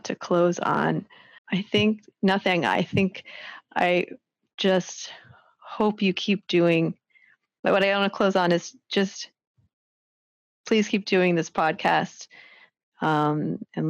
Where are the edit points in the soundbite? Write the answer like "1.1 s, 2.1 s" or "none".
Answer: 1.4 s